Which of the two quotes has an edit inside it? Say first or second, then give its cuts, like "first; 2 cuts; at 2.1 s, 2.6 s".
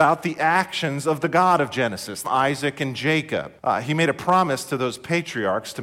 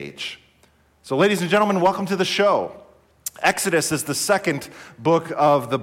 first; 2 cuts; at 2.2 s, 3.6 s